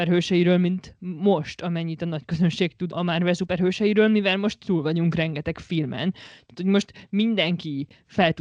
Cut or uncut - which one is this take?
cut